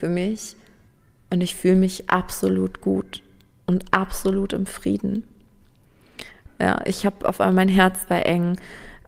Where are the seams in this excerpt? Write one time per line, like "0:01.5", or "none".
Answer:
0:06.5